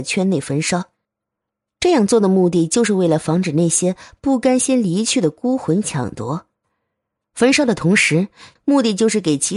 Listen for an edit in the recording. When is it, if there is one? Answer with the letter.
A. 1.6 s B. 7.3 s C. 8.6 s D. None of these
C